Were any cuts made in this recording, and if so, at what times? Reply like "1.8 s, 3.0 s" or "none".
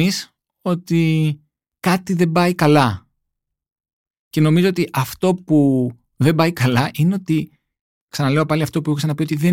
none

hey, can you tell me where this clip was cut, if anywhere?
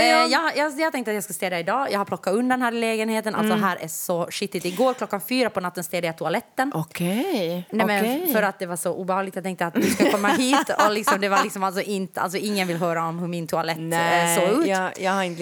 none

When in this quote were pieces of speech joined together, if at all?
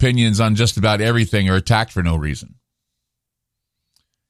none

